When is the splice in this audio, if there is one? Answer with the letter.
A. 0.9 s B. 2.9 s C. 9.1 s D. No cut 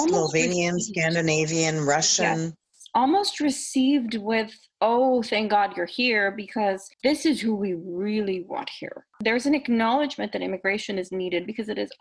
D